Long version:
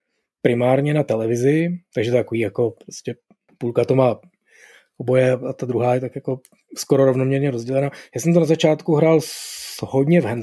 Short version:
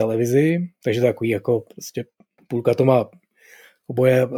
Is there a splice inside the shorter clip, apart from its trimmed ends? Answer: no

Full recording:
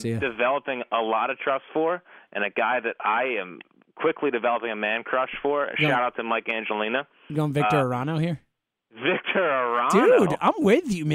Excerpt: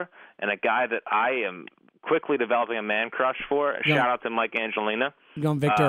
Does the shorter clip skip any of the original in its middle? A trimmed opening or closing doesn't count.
no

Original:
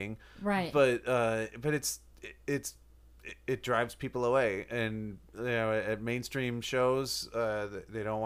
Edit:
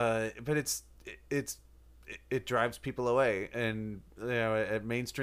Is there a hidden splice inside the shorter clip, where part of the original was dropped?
no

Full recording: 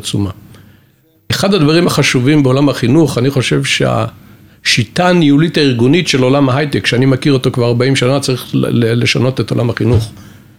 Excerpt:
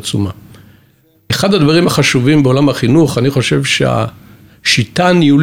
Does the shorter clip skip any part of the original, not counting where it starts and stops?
no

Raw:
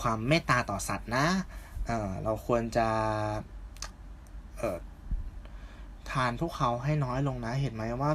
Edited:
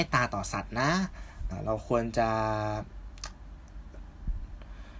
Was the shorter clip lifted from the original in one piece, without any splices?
no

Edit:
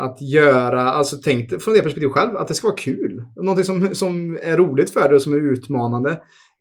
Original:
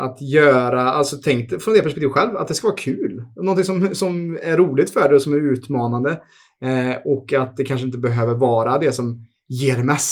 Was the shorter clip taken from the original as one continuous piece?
yes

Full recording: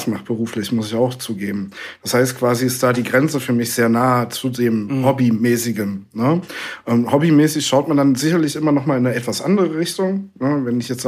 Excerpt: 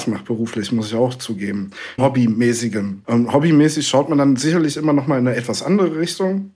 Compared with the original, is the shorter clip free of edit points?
no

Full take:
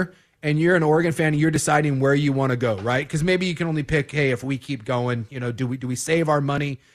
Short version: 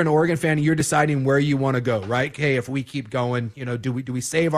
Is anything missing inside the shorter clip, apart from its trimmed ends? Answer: yes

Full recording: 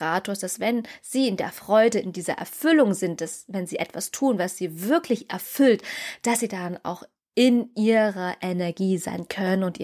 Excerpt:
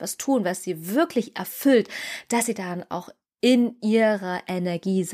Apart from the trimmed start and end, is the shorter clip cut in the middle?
no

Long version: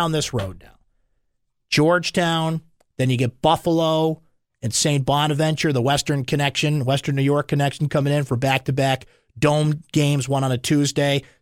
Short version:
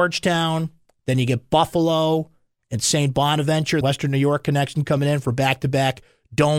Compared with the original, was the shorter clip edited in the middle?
yes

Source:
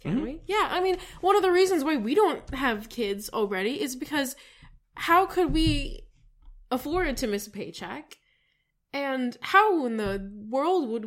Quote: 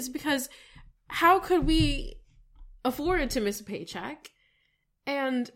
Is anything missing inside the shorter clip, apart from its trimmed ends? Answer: no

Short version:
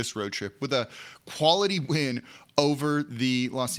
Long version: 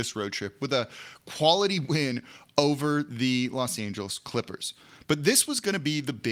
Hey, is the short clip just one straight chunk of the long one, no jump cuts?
yes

